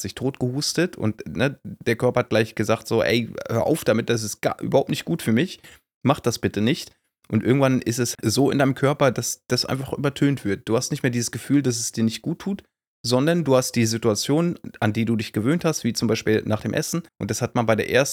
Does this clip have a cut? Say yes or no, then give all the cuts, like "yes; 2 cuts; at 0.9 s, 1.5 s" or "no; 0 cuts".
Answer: yes; 2 cuts; at 8.1 s, 17.1 s